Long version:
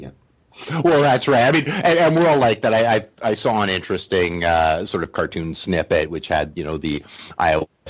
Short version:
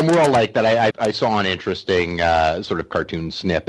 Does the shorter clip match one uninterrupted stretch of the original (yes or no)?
no